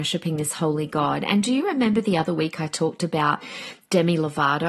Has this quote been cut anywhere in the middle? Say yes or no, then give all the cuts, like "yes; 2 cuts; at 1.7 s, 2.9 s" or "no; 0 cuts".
no; 0 cuts